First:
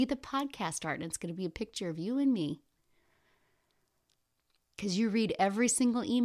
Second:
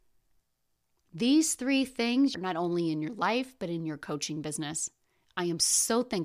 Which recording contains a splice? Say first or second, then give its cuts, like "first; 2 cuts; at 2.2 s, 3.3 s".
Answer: second; 1 cut; at 2.3 s